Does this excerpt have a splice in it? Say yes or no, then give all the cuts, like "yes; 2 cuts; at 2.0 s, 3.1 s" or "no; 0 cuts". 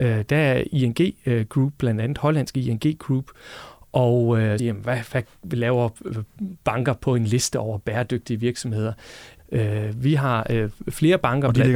yes; 2 cuts; at 4.6 s, 9.4 s